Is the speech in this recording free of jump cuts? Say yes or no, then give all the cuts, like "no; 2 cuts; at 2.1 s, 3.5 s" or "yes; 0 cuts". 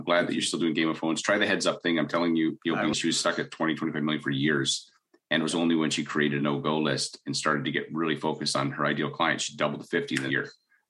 no; 1 cut; at 2.9 s